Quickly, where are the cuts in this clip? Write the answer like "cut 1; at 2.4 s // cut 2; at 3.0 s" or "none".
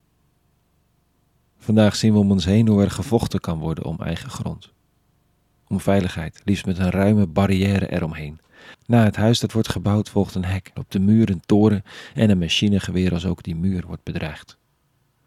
cut 1; at 8.7 s // cut 2; at 10.8 s